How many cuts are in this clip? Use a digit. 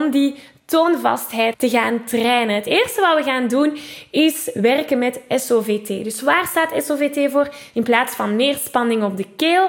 2